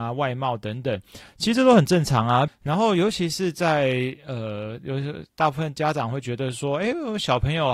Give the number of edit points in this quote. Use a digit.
1